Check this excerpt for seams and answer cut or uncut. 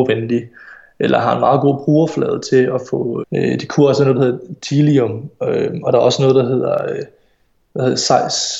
cut